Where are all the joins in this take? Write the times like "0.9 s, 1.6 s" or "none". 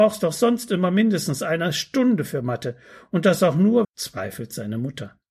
3.8 s